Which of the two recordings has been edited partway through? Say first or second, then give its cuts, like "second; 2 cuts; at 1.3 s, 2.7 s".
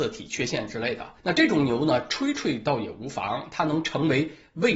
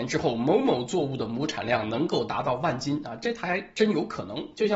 first; 1 cut; at 1.2 s